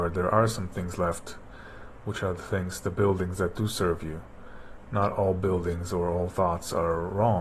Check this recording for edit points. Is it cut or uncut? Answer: uncut